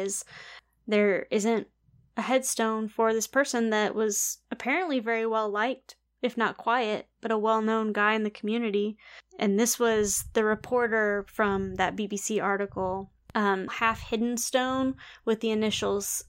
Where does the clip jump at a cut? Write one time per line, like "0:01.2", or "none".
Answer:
0:13.7